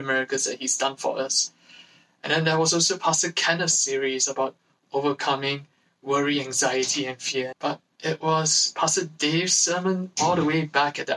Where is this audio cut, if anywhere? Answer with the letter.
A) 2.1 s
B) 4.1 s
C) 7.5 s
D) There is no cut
C